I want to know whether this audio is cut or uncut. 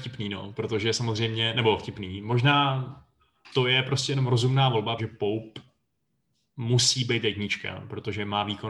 cut